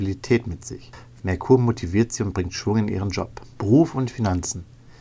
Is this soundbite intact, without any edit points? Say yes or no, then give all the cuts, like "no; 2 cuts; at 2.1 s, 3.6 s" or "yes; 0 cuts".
no; 2 cuts; at 1.2 s, 3.6 s